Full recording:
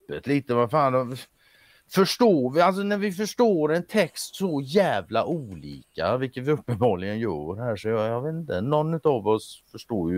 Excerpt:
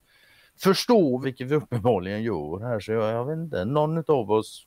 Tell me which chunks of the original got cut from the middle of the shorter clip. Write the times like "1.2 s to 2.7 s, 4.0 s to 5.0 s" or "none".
2.5 s to 6.2 s